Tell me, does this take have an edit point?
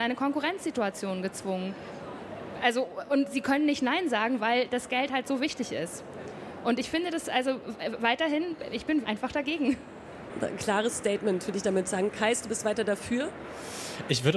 yes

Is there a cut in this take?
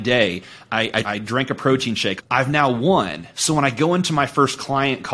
yes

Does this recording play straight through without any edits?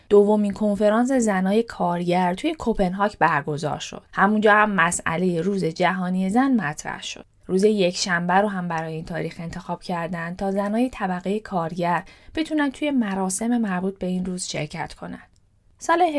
no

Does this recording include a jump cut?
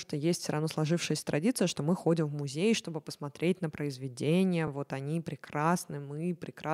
no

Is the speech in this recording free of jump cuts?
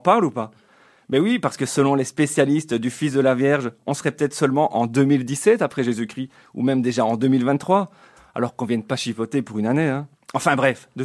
yes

